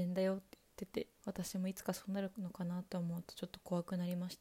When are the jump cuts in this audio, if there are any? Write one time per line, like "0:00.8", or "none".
0:01.1